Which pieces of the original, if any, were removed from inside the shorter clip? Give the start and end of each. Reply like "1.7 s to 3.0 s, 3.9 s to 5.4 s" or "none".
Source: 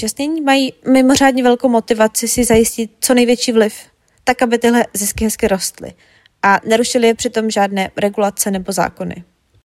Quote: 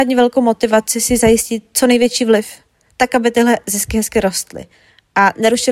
none